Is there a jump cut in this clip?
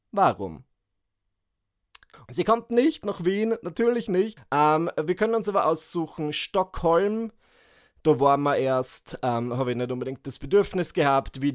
yes; 2 cuts; at 2.1 s, 4.4 s

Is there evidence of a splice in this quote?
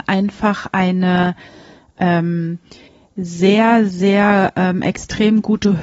no; 0 cuts

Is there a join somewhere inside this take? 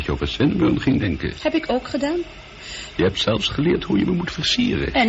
yes; 1 cut; at 2.9 s

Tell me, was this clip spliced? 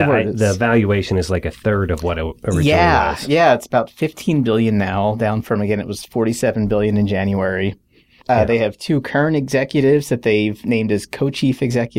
yes; 1 cut; at 8.2 s

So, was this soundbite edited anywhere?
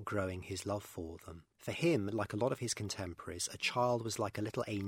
yes; 1 cut; at 1.5 s

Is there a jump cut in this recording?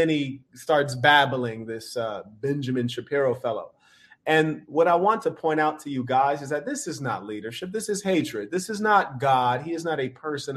no; 0 cuts

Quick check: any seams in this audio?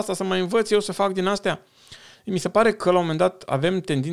no; 0 cuts

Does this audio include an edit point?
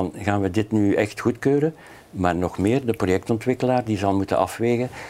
no; 0 cuts

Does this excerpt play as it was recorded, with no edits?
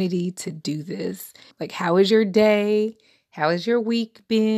no; 1 cut; at 1.5 s

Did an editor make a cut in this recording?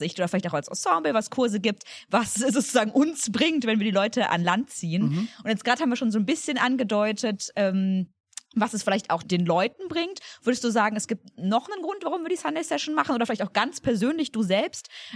yes; 1 cut; at 9.2 s

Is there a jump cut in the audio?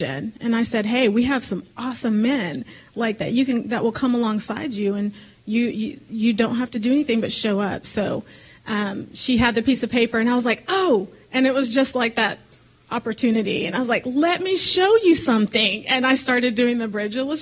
no; 0 cuts

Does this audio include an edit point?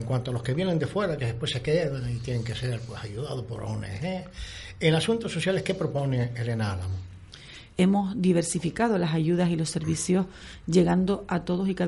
yes; 1 cut; at 7.7 s

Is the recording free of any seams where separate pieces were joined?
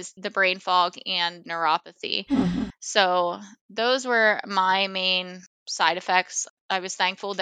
yes; 0 cuts

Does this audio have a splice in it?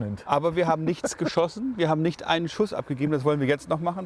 no; 0 cuts

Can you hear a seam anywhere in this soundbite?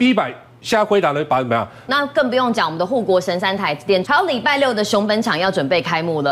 yes; 2 cuts; at 1.9 s, 4.0 s

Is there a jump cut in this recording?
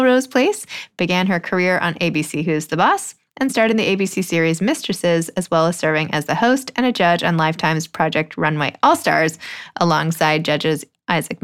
no; 0 cuts

